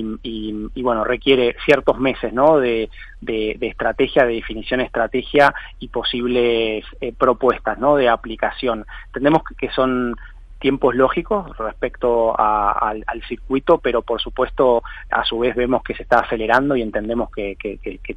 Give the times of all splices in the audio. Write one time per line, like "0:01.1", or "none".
0:15.1